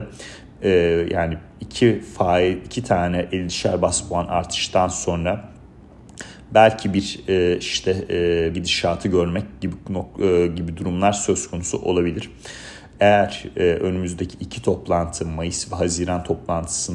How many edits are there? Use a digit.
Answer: 2